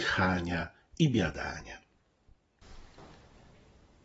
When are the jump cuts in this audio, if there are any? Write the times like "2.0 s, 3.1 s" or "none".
none